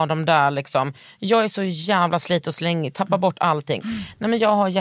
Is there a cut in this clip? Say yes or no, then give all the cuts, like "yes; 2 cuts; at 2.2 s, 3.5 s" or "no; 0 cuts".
yes; 1 cut; at 3.8 s